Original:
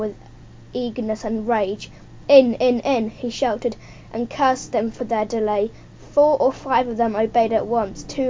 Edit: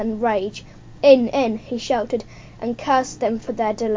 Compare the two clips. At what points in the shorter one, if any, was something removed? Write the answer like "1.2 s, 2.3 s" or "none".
1.3 s